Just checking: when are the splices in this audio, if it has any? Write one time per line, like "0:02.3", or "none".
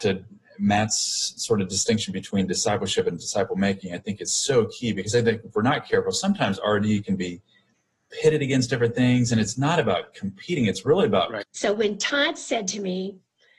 0:11.4

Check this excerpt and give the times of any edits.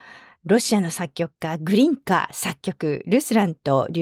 none

